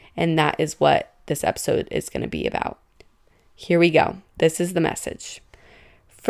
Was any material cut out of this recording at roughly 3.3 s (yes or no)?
no